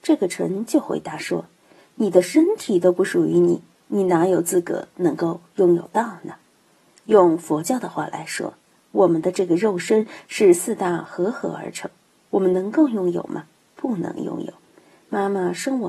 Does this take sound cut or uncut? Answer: uncut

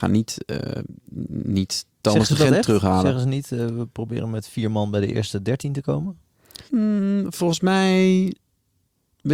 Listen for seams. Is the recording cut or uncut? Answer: cut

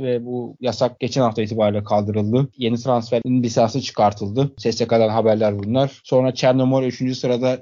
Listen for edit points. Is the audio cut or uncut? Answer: uncut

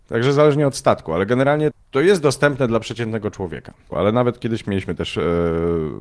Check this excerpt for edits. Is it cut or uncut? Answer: cut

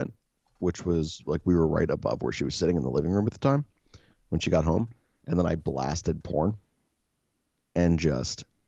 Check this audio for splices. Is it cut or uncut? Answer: uncut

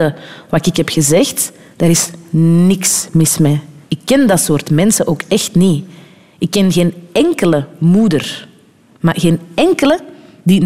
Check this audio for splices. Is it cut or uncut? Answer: cut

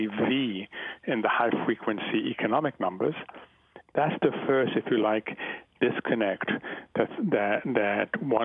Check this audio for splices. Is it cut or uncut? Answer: cut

